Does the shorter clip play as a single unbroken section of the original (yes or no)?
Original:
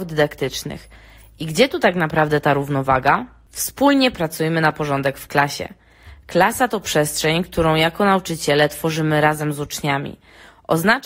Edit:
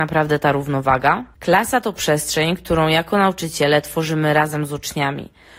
no